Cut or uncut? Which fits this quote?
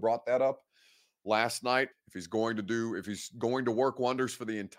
cut